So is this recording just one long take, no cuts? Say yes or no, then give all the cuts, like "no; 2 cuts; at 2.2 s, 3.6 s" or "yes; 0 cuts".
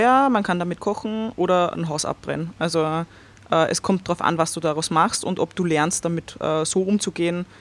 yes; 0 cuts